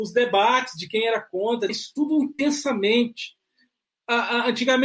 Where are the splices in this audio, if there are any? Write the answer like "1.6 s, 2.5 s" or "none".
1.7 s